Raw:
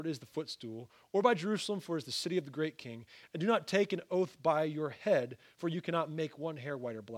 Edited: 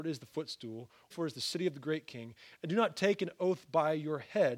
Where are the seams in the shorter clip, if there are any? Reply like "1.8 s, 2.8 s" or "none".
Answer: 1.1 s